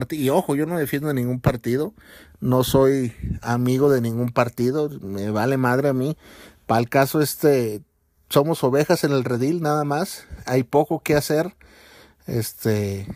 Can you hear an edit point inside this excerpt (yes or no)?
no